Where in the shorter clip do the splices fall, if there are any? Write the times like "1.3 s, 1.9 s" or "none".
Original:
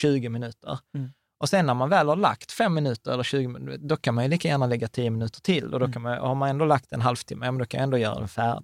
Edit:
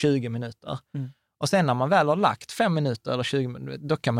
none